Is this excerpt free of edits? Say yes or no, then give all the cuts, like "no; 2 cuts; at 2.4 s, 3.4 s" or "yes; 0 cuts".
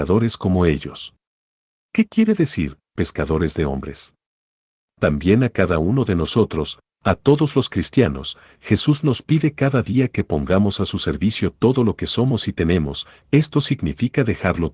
no; 2 cuts; at 1.9 s, 4.8 s